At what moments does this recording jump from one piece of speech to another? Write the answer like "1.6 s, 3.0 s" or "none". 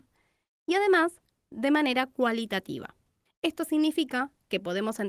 none

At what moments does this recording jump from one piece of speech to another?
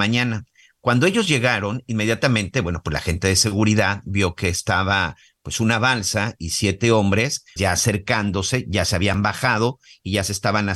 7.6 s

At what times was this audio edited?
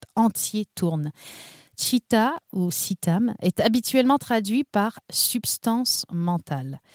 none

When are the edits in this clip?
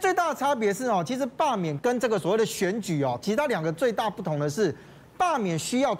1.8 s

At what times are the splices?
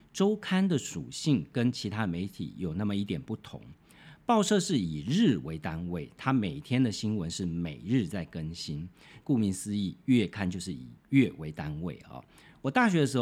9.2 s

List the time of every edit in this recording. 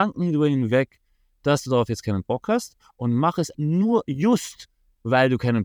3.5 s

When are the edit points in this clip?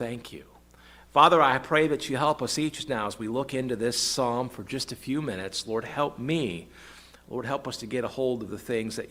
none

